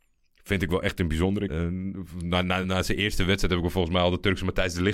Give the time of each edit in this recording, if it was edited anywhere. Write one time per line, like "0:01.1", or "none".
0:01.5
0:02.6